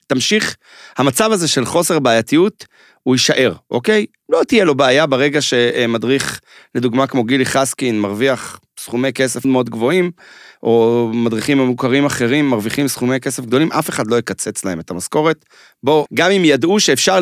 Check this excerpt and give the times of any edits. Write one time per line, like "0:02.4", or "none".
0:09.4
0:16.1